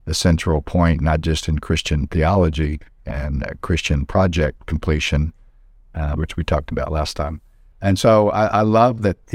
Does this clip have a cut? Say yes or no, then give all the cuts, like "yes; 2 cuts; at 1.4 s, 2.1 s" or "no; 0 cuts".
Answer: yes; 2 cuts; at 6.2 s, 7.7 s